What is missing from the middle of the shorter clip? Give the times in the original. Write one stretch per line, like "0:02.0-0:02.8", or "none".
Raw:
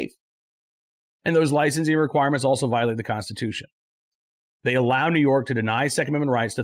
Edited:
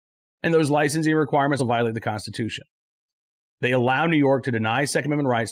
0:02.4-0:02.6